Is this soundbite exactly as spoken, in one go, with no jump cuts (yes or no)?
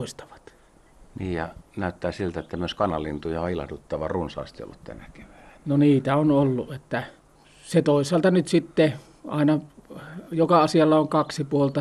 yes